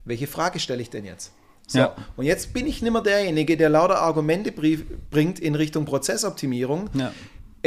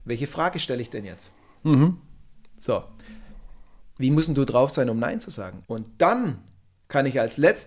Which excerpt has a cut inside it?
second; 2 cuts; at 1.6 s, 5.6 s

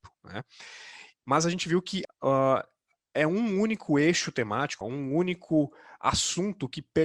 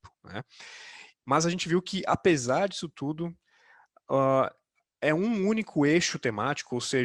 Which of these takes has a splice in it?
first; 2 cuts; at 2.0 s, 4.8 s

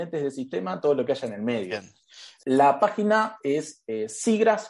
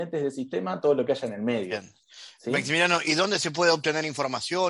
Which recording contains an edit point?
first; 1 cut; at 2.4 s

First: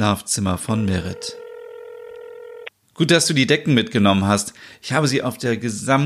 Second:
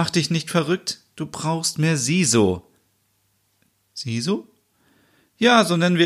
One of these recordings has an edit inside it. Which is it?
first; 1 cut; at 2.8 s

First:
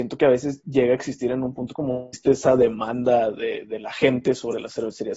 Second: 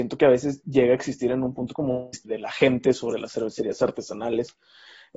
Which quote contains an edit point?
second; 1 cut; at 2.2 s

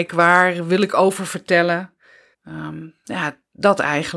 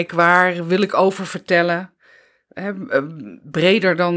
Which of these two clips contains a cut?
first; 1 cut; at 2.3 s

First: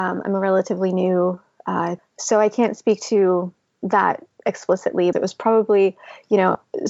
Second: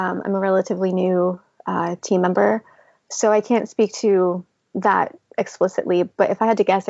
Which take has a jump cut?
first; 2 cuts; at 2.0 s, 5.1 s

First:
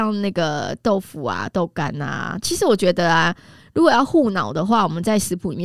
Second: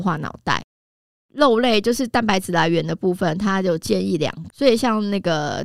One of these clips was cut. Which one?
second; 2 cuts; at 1.2 s, 4.5 s

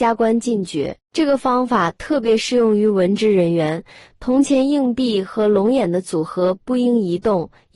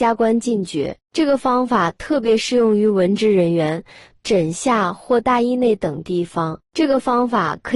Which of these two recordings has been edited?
second; 1 cut; at 4.2 s

